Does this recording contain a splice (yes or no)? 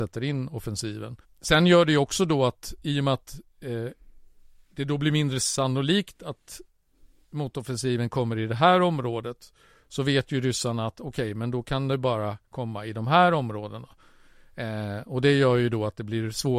yes